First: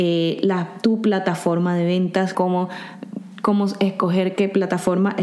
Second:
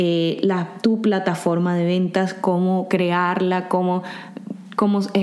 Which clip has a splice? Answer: first; 1 cut; at 2.3 s

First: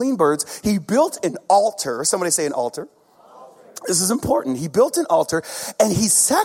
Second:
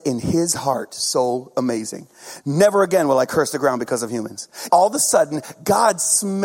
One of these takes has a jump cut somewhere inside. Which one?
second; 1 cut; at 4.7 s

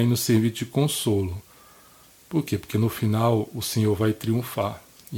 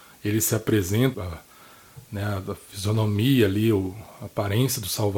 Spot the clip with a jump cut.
second; 1 cut; at 1.1 s

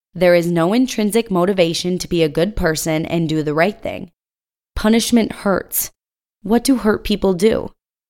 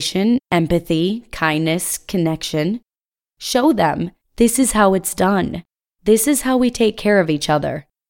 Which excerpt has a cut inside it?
first; 1 cut; at 4.5 s

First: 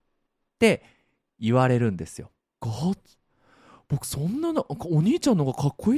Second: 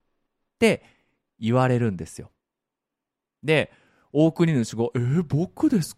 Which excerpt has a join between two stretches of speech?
first; 1 cut; at 2.6 s

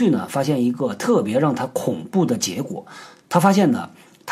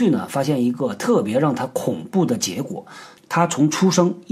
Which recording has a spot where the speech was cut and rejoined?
second; 1 cut; at 3.2 s

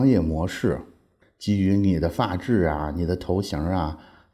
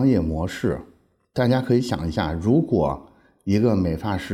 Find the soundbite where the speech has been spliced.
first; 1 cut; at 1.2 s

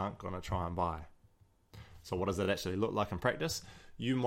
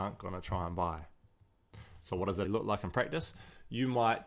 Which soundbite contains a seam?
second; 1 cut; at 2.4 s

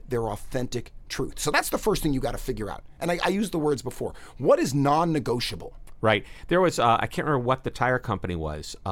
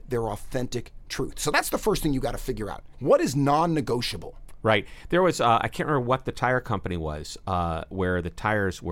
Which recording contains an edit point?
second; 1 cut; at 2.9 s

